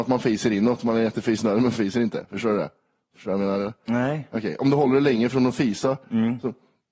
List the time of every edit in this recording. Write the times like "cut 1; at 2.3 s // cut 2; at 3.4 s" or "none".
none